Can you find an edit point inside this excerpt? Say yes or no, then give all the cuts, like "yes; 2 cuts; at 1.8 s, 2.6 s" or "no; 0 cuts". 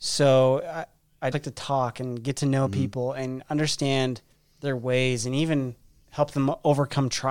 yes; 1 cut; at 1.3 s